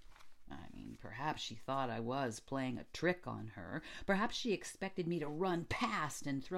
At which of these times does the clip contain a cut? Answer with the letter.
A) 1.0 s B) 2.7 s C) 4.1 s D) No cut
D